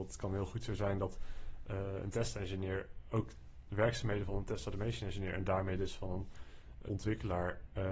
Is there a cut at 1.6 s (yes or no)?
no